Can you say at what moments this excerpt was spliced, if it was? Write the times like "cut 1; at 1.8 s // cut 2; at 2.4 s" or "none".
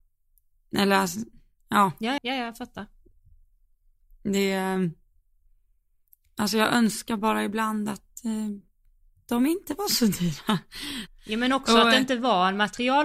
cut 1; at 2.2 s // cut 2; at 11.1 s

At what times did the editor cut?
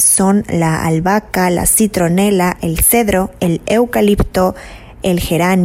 none

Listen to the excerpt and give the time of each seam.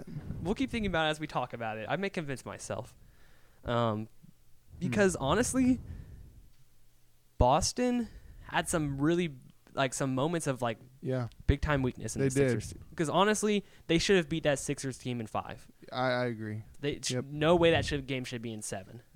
cut 1; at 16.7 s

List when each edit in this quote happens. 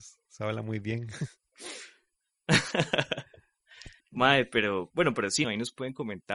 cut 1; at 4.0 s // cut 2; at 5.4 s

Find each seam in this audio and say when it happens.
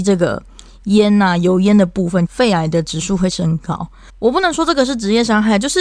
cut 1; at 2.3 s // cut 2; at 4.1 s

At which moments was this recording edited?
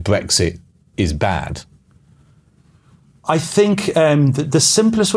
none

